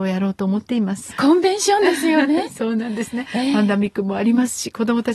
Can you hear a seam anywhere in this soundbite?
yes; 1 cut; at 1.1 s

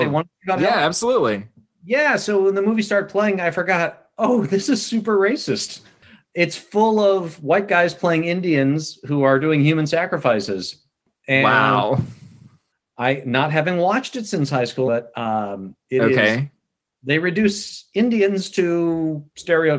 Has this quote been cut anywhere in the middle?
yes; 1 cut; at 14.9 s

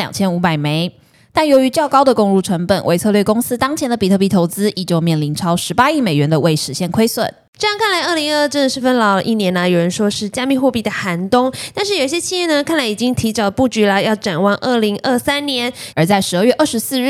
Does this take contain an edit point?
yes; 2 cuts; at 8.8 s, 15.9 s

